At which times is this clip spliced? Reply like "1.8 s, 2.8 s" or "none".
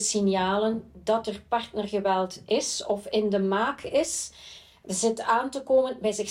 none